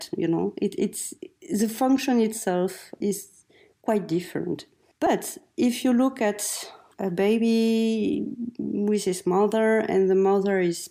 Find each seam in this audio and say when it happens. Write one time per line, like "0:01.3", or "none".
0:03.0